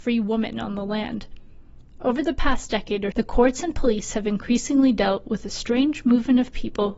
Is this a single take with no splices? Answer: no; 1 cut; at 3.1 s

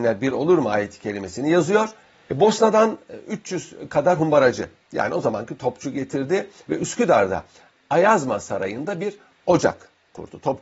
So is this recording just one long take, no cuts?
no; 1 cut; at 2.3 s

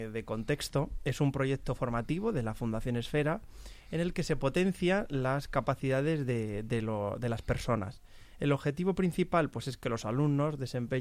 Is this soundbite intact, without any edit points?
yes; 0 cuts

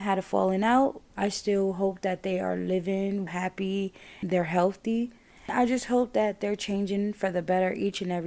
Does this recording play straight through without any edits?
no; 2 cuts; at 1.1 s, 3.3 s

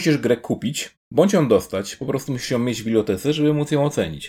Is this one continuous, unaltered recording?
yes; 0 cuts

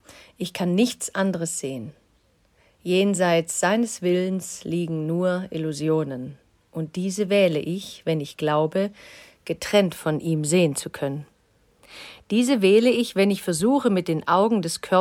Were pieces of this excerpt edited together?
no; 0 cuts

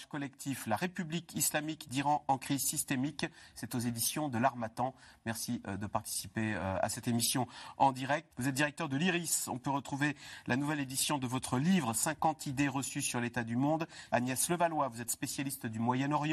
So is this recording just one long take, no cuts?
no; 2 cuts; at 8.3 s, 14.1 s

